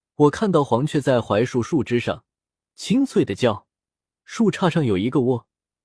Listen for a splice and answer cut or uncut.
uncut